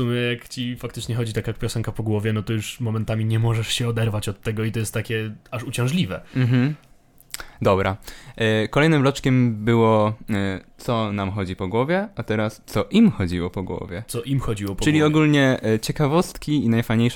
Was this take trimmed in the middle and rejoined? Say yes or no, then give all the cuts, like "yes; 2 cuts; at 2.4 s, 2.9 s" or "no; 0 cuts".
no; 0 cuts